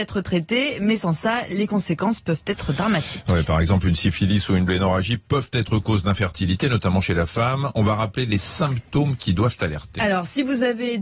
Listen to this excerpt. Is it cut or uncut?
uncut